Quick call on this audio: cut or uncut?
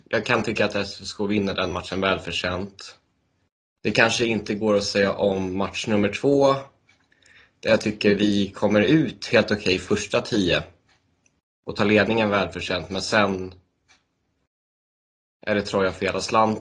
uncut